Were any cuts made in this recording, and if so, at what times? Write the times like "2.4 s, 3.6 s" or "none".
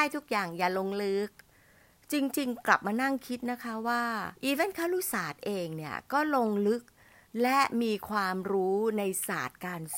4.4 s

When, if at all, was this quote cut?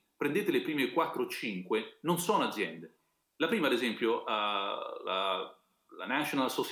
3.2 s

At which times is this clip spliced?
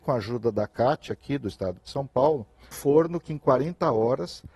2.7 s

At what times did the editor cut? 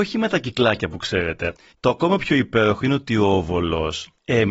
1.7 s

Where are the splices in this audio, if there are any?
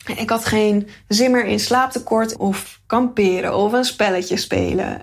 2.4 s, 3.5 s

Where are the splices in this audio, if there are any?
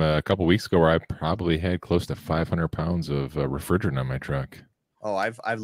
none

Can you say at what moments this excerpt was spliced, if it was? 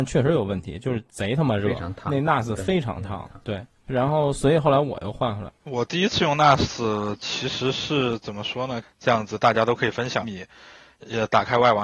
5.5 s, 8.8 s, 10.2 s

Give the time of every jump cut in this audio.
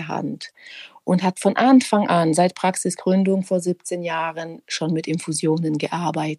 none

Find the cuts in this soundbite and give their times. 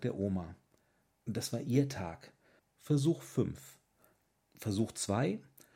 2.6 s, 4.5 s

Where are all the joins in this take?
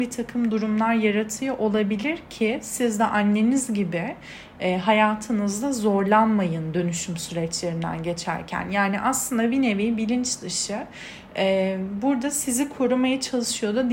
none

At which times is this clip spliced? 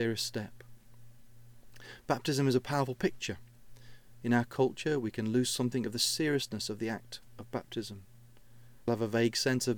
4.2 s, 8.9 s

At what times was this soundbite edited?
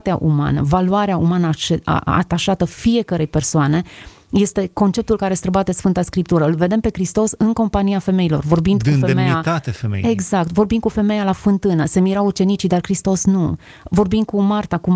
none

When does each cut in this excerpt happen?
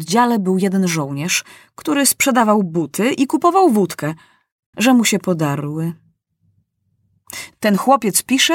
4.7 s, 7.5 s

